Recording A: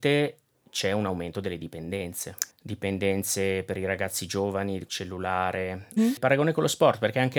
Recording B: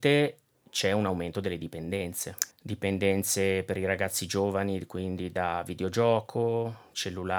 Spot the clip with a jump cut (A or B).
A